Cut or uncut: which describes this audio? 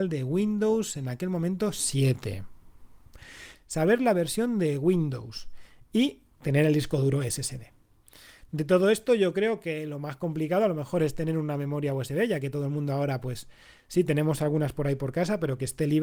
cut